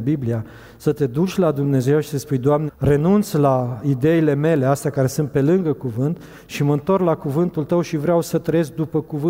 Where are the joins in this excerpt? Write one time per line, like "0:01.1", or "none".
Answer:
0:02.7